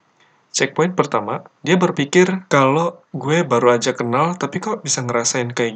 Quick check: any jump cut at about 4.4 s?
no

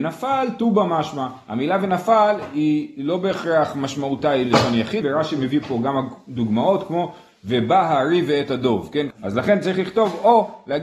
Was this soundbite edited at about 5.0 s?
yes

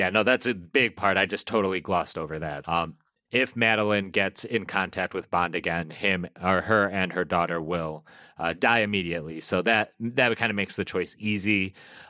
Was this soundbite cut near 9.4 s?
no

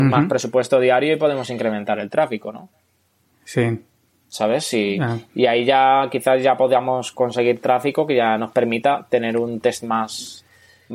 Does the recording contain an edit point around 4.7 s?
no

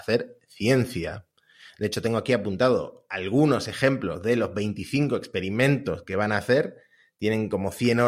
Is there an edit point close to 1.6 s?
no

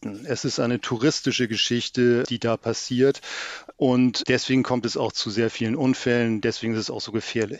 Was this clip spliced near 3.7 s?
no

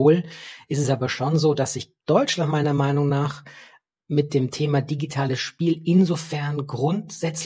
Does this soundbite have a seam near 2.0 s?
yes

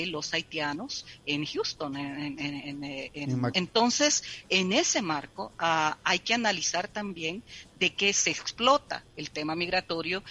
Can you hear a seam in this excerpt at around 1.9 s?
no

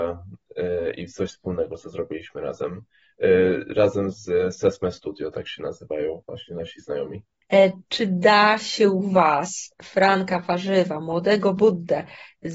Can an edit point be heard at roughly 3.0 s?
no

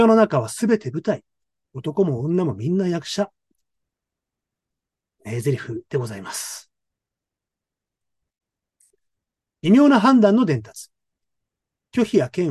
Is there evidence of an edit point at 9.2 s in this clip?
no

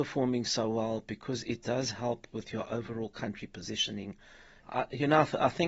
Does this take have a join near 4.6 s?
yes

